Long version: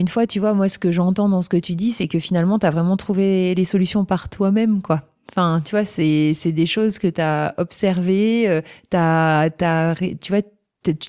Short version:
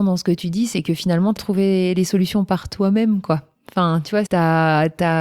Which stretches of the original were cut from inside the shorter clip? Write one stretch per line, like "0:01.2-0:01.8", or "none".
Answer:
0:02.6-0:03.0
0:05.9-0:08.9

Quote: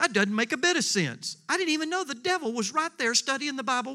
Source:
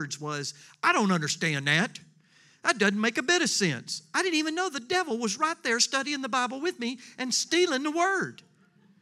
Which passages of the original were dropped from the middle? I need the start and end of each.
none

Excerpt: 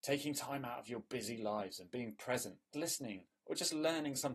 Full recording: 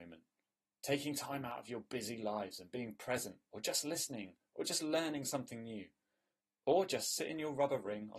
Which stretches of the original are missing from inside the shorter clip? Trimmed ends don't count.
0:03.5-0:03.8

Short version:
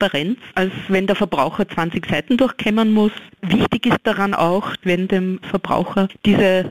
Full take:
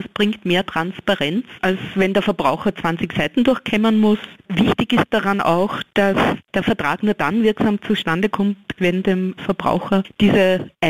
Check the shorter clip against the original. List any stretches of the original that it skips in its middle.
0:05.9-0:08.7

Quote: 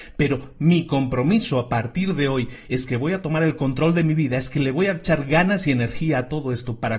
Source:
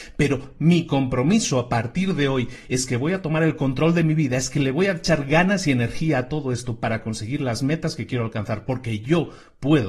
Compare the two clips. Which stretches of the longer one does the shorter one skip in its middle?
none

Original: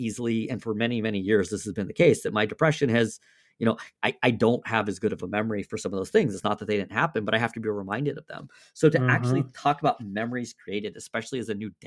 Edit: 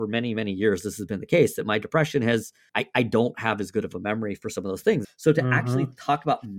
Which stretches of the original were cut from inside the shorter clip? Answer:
0:03.4-0:04.0
0:06.3-0:08.6

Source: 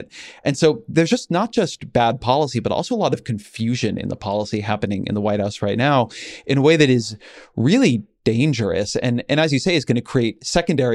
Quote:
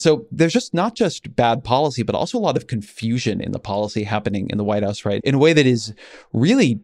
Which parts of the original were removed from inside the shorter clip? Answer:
0:05.8-0:06.4

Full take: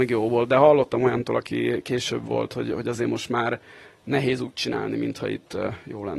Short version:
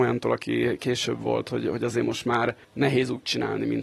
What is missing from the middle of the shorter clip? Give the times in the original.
0:03.7-0:04.0

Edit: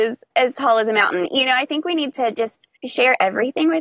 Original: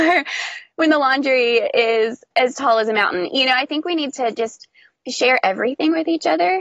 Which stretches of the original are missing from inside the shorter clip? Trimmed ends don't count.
0:04.8-0:05.0

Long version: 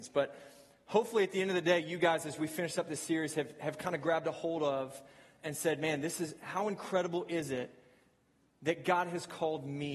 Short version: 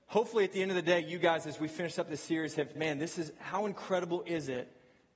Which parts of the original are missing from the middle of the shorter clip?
0:03.5-0:05.8

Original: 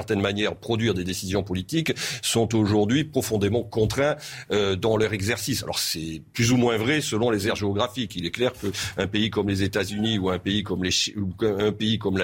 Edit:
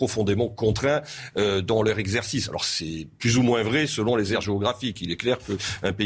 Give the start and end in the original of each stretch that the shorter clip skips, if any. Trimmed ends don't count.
none

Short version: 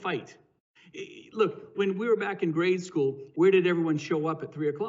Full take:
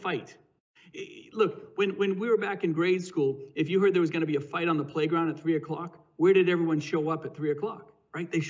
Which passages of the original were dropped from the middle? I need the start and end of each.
0:01.7-0:02.0
0:03.5-0:06.1

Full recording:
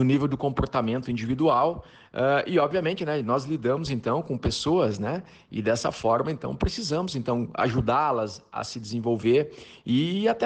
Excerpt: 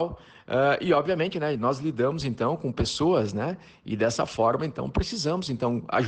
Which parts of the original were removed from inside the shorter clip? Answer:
none

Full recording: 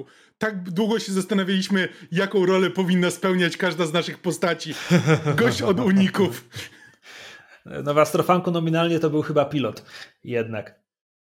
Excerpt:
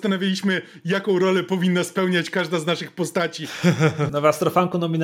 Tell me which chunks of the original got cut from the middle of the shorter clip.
0:05.4-0:07.8

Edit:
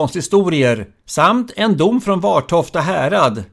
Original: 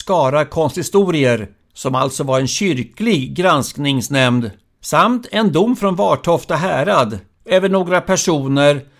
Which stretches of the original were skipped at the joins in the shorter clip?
0:01.6-0:04.8

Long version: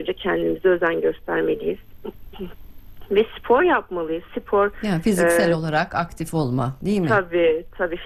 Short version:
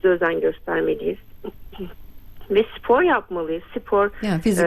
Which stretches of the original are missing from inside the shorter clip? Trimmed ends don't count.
none

